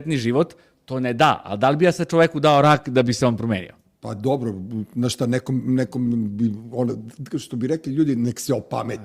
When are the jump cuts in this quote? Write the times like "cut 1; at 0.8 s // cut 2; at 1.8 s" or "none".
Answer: none